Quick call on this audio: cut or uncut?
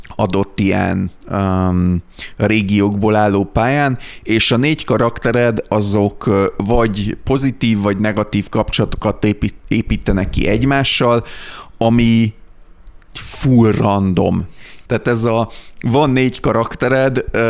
cut